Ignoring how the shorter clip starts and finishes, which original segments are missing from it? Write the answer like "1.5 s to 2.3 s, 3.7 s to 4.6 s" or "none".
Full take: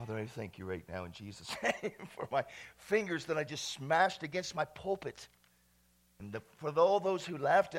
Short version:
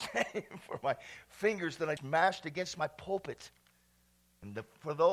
3.5 s to 3.7 s